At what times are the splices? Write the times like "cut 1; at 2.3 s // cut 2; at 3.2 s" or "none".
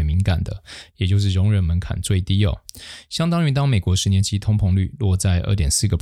none